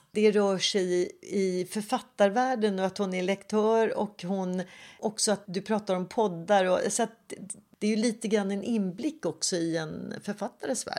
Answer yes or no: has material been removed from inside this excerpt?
yes